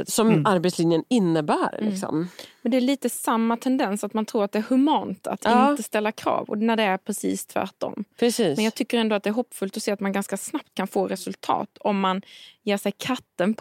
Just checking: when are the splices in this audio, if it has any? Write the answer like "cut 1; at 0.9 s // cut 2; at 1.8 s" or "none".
none